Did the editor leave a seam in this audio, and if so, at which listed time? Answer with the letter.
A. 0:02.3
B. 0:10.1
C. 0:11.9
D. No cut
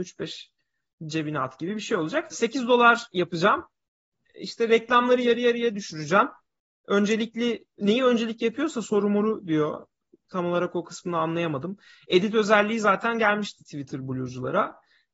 A